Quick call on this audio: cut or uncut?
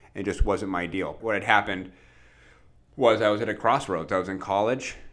cut